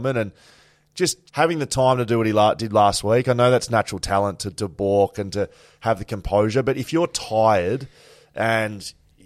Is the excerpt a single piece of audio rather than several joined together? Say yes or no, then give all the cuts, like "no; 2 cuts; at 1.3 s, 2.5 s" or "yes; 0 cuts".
no; 1 cut; at 1.3 s